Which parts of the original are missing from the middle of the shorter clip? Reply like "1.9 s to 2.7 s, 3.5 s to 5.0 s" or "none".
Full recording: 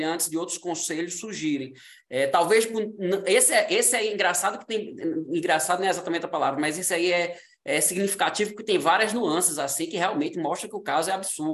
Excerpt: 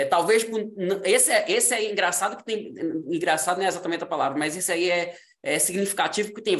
none